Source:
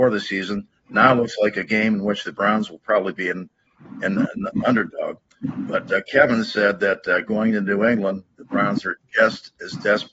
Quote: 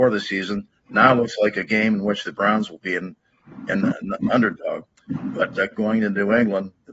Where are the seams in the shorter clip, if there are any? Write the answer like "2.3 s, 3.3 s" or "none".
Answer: 2.8 s, 5.7 s

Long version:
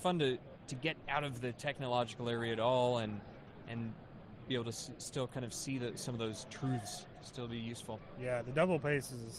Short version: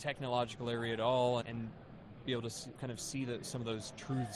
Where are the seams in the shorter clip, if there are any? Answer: 1.4 s, 2.7 s

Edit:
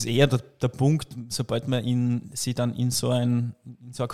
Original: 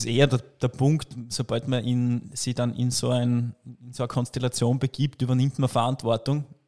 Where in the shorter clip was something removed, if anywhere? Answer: none

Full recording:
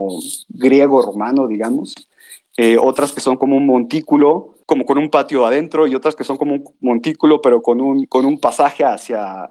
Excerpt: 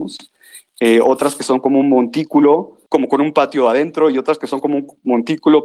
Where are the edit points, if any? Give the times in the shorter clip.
none

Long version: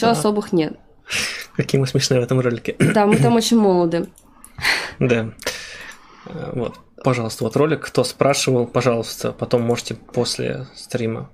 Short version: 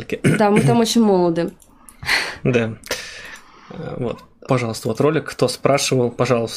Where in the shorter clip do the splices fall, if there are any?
none

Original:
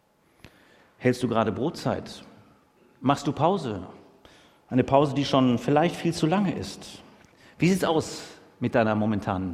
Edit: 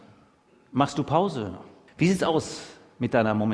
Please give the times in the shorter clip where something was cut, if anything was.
1.9 s

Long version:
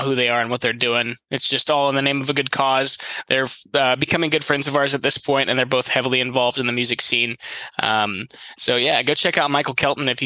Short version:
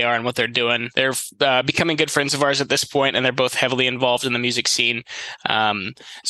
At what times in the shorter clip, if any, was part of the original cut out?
0.9 s

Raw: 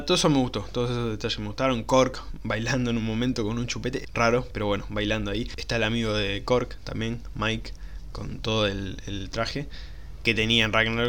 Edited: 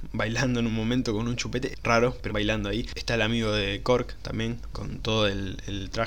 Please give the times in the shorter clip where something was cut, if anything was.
2.3 s, 4.7 s

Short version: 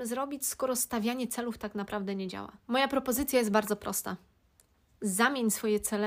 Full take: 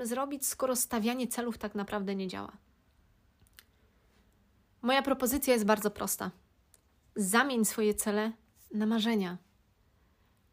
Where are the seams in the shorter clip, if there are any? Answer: 2.6 s

